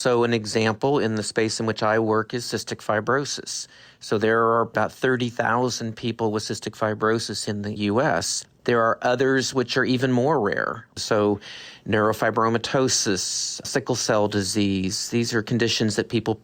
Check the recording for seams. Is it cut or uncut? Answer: uncut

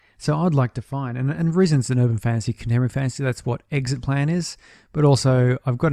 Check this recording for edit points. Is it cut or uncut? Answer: uncut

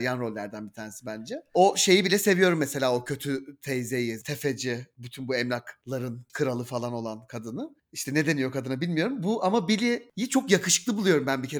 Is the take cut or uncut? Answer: cut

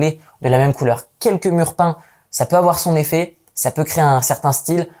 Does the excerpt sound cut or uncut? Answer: uncut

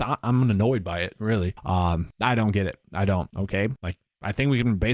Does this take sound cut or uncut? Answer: cut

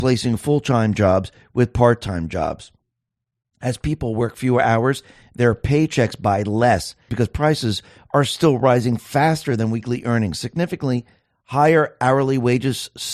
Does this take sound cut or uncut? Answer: cut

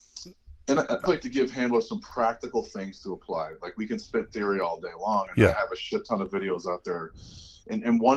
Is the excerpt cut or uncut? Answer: cut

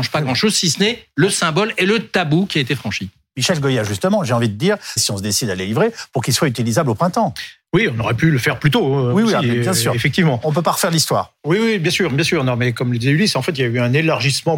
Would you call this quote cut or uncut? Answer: cut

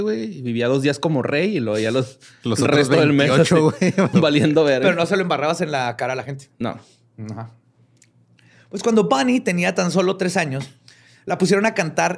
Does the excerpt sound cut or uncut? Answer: cut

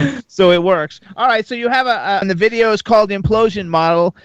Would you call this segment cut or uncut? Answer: cut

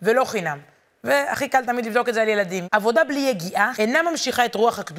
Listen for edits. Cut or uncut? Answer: cut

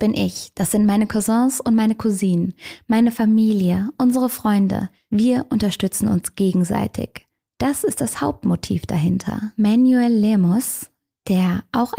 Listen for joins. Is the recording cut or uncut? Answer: uncut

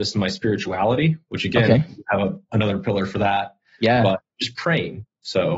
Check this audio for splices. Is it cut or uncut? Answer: uncut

